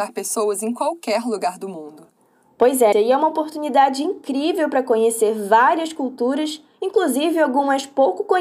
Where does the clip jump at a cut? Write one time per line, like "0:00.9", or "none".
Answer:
0:02.9